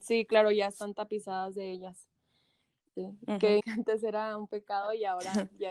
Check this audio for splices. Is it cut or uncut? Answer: cut